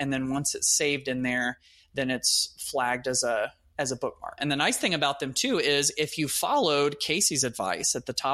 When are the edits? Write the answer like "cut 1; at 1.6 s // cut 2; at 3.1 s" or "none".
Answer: cut 1; at 4.4 s